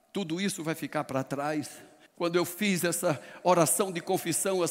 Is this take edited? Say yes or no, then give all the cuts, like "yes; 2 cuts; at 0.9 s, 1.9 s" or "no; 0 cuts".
yes; 1 cut; at 2.1 s